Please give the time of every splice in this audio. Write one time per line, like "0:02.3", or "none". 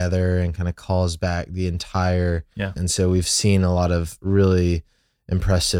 0:02.8